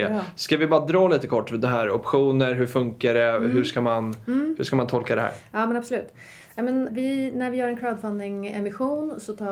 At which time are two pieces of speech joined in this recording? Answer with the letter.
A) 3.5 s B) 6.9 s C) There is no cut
B